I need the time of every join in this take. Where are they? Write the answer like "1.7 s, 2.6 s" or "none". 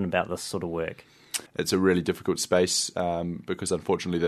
1.5 s